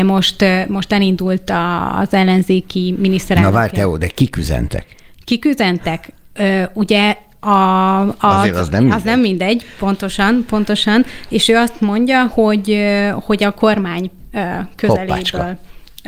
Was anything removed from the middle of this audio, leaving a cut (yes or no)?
no